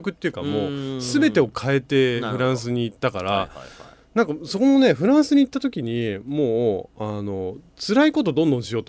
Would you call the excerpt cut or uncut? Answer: uncut